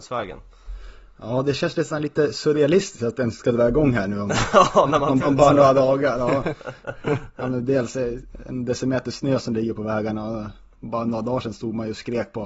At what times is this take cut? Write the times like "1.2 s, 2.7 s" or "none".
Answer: 5.2 s